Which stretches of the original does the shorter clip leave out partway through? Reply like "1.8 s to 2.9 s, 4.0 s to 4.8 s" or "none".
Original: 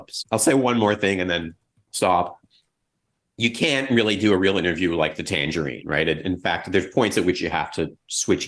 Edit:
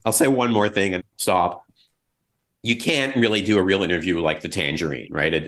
1.2 s to 1.7 s

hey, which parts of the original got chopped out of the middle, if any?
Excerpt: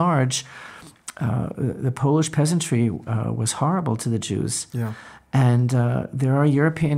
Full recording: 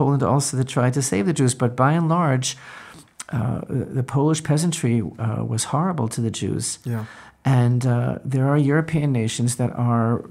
none

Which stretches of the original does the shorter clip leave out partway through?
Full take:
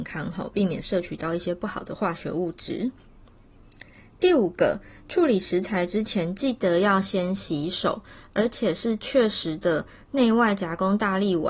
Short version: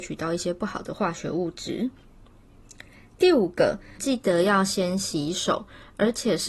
5.0 s to 6.4 s

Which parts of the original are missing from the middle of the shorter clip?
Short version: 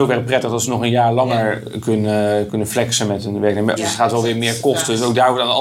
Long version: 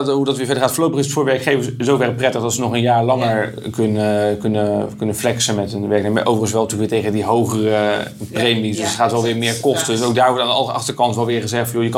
4.4 s to 5.0 s, 6.2 s to 8.8 s

